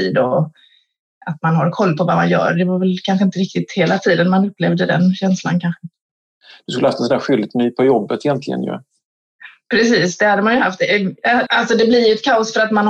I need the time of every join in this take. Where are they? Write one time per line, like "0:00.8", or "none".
0:11.5